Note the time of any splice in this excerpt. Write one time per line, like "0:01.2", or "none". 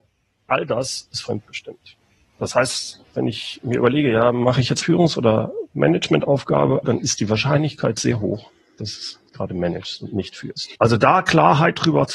0:04.8
0:06.8
0:10.7